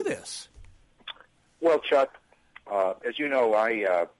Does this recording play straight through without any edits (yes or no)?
yes